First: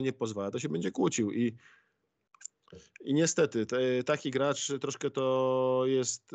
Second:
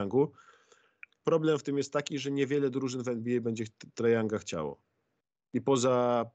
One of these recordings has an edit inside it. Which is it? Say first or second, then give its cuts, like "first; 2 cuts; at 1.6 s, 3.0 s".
second; 1 cut; at 1.2 s